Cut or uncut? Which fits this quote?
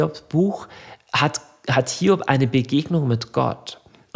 uncut